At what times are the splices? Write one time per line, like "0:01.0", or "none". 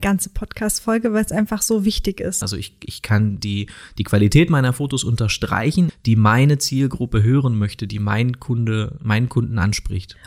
0:02.4
0:05.9